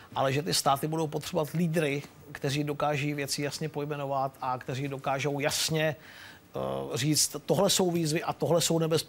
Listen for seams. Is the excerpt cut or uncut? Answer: uncut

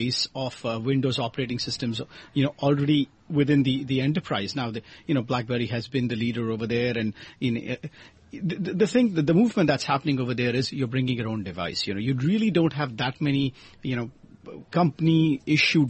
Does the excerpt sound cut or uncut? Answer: uncut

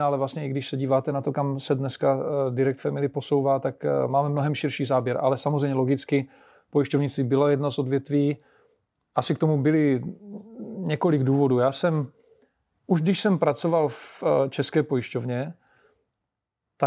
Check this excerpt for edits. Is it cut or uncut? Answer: uncut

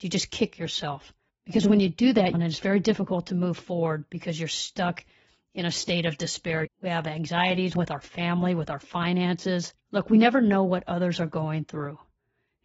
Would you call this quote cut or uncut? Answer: cut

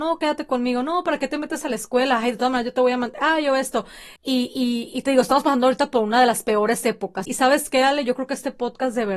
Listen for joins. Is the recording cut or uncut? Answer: cut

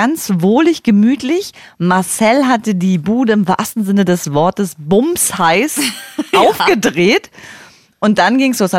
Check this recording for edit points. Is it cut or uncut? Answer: uncut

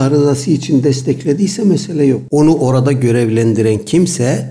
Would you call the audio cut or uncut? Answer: cut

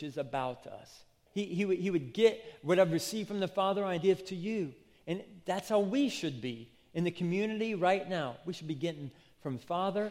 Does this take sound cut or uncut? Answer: cut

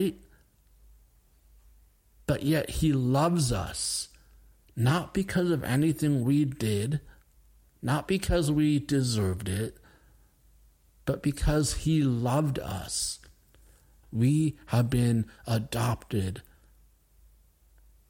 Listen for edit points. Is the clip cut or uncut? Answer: cut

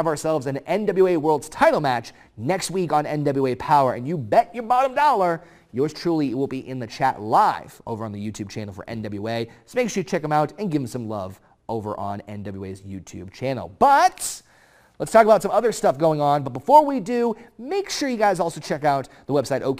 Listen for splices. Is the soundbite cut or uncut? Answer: uncut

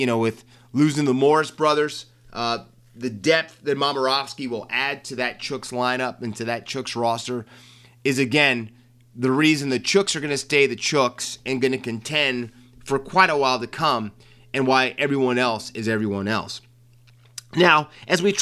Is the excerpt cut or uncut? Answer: uncut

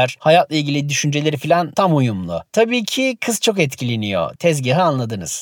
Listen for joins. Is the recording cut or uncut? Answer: uncut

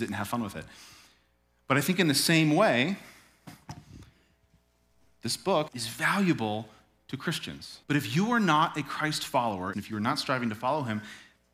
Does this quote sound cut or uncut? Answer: cut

